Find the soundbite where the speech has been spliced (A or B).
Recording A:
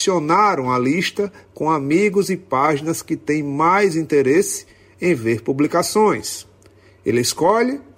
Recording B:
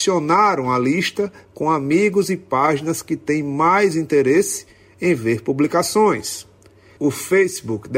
A